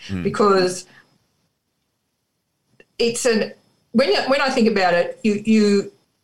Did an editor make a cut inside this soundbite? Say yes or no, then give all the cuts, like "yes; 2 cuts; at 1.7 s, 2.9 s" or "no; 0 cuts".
no; 0 cuts